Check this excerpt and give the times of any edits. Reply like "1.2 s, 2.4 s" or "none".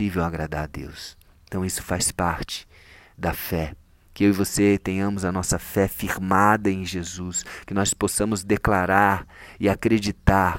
none